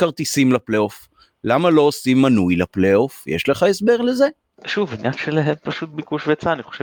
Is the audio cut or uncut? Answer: uncut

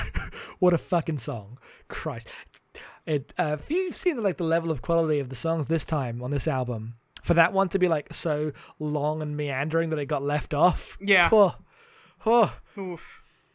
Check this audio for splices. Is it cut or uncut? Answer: uncut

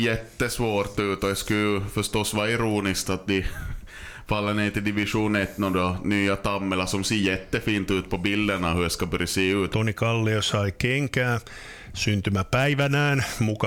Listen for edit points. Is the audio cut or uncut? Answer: cut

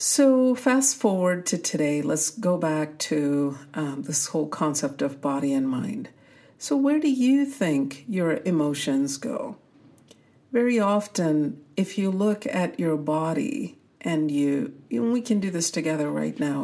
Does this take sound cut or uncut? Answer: uncut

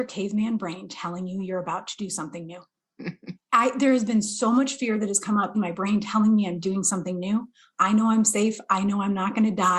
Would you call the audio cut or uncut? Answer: cut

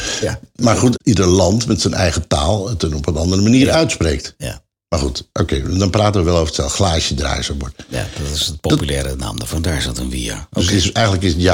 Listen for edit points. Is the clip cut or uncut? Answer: cut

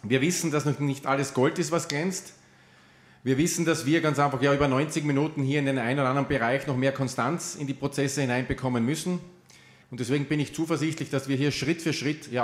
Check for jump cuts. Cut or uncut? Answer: cut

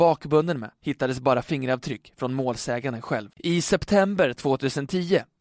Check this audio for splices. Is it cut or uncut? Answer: cut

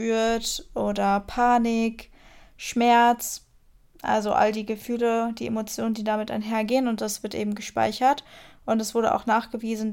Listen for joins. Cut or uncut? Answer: uncut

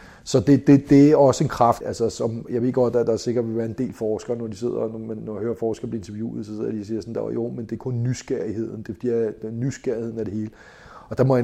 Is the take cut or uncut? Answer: cut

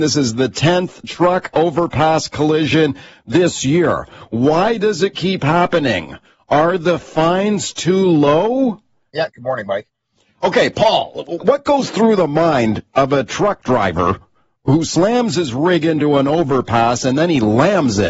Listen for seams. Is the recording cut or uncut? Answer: cut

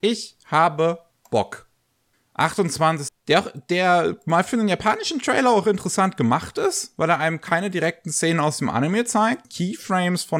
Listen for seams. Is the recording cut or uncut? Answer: cut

